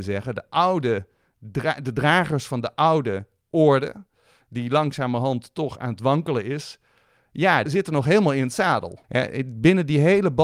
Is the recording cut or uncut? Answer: cut